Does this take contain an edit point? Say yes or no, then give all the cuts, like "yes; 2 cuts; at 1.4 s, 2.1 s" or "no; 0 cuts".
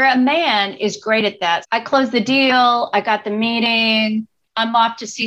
yes; 1 cut; at 1.6 s